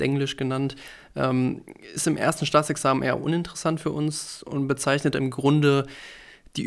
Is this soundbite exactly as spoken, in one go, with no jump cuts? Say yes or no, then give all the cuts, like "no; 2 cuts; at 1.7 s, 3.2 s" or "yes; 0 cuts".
yes; 0 cuts